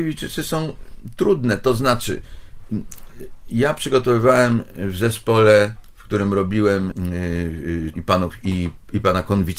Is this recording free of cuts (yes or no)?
no